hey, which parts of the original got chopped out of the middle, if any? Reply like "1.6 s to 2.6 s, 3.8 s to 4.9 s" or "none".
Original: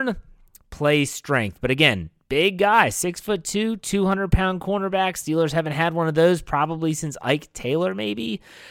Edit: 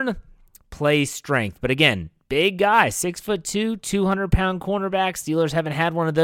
none